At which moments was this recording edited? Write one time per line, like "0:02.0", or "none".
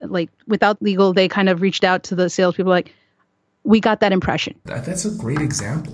0:04.7